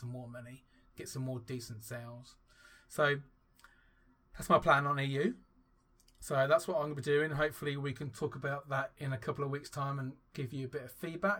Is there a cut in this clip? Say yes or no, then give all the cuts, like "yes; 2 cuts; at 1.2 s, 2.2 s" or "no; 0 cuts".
no; 0 cuts